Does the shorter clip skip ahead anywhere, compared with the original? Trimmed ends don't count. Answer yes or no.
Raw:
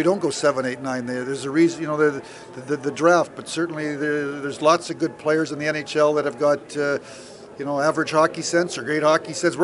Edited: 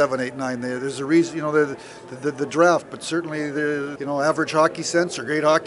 yes